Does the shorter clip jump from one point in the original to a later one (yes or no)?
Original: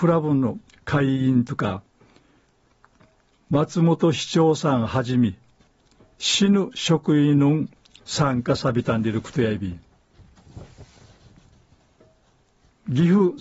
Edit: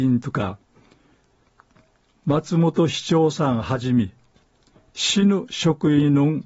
no